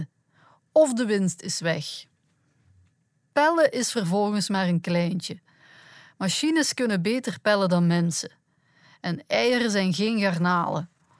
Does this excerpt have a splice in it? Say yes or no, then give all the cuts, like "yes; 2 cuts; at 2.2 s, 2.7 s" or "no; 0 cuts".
no; 0 cuts